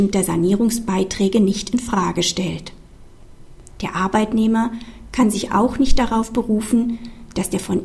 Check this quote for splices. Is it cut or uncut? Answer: cut